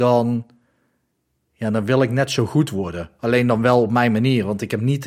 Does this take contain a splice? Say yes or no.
no